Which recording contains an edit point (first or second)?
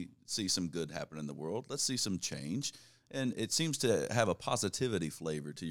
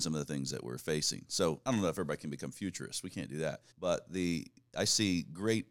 second